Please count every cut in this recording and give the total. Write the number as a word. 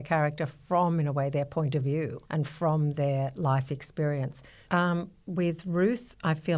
two